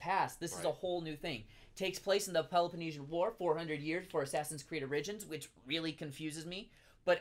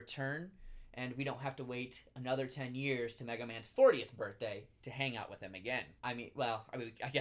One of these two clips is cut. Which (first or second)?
second